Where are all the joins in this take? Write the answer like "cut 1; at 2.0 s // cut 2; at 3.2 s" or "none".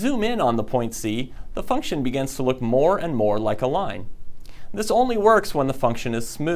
none